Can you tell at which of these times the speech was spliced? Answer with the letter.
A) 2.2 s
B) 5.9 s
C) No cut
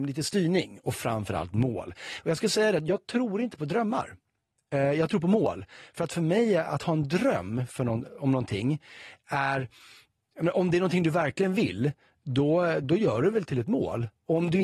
C